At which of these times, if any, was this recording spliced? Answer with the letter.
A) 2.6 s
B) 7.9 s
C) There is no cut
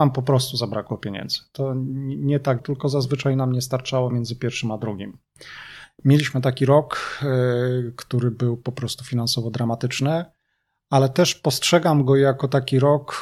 A